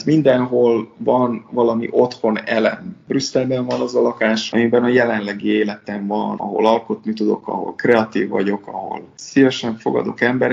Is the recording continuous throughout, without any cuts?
yes; 0 cuts

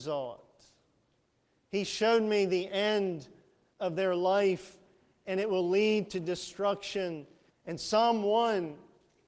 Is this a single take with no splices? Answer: no; 1 cut; at 7.5 s

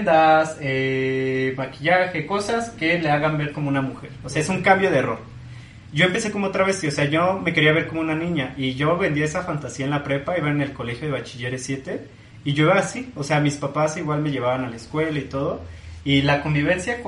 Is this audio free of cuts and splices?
yes; 0 cuts

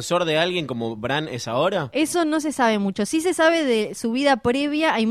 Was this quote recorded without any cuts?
yes; 0 cuts

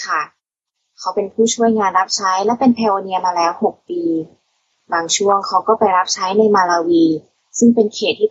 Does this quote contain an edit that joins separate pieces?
no; 0 cuts

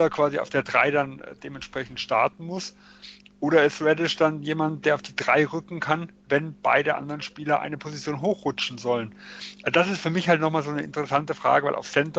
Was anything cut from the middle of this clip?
no; 0 cuts

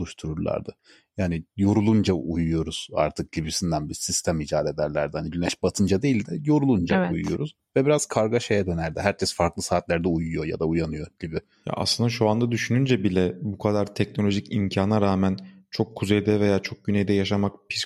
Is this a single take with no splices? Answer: yes; 0 cuts

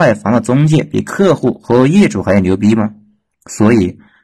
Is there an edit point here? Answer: yes; 1 cut; at 3.3 s

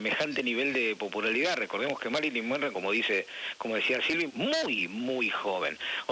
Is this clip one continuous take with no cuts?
no; 2 cuts; at 2.7 s, 4.3 s

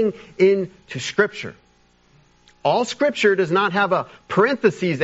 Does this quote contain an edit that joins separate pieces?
no; 0 cuts

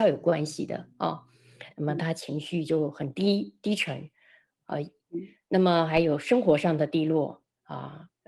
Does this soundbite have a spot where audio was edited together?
yes; 1 cut; at 1.7 s

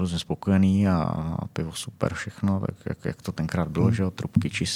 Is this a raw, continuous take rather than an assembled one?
yes; 0 cuts

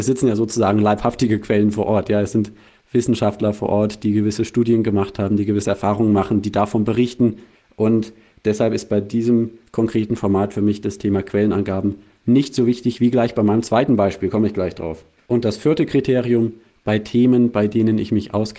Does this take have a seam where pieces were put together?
no; 0 cuts

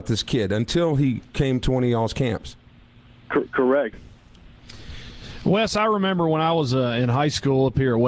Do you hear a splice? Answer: yes; 1 cut; at 3.9 s

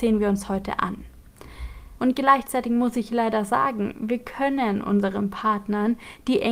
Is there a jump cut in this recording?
yes; 1 cut; at 2.0 s

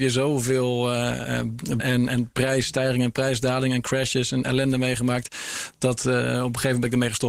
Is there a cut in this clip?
yes; 1 cut; at 1.8 s

